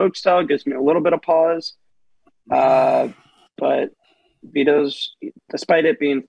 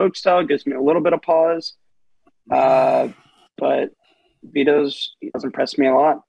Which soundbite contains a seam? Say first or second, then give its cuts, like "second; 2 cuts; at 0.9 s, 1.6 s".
second; 1 cut; at 5.3 s